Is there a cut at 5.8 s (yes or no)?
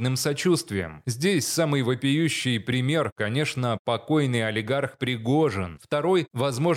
yes